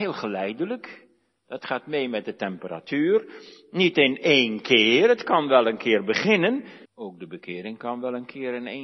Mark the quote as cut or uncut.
cut